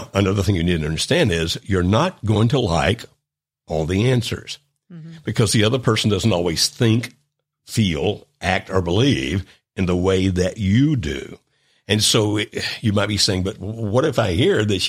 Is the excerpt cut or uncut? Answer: uncut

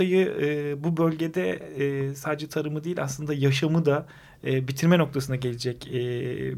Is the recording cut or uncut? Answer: uncut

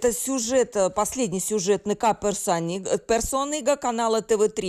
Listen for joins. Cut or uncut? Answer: uncut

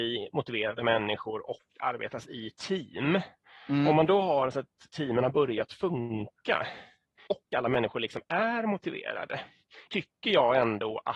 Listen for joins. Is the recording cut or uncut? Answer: cut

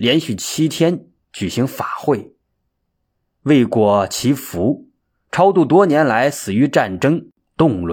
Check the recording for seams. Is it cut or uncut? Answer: uncut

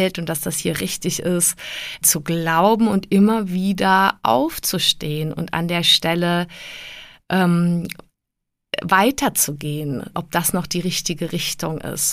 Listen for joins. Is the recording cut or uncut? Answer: cut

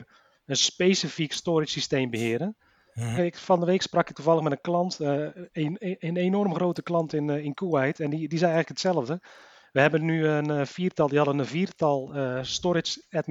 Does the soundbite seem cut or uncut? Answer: cut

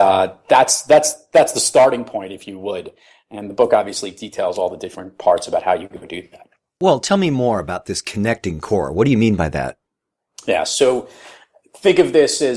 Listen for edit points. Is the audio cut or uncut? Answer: uncut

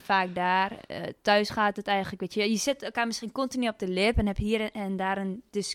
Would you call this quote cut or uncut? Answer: uncut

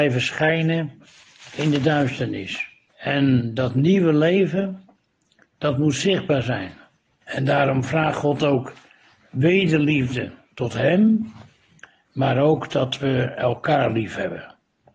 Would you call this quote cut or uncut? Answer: cut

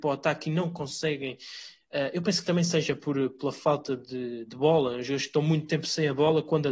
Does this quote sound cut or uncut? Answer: uncut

